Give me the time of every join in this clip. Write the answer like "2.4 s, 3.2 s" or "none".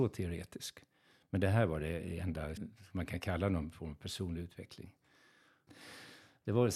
2.6 s, 5.7 s